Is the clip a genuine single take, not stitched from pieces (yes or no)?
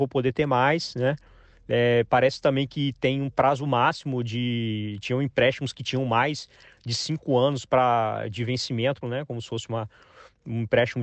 no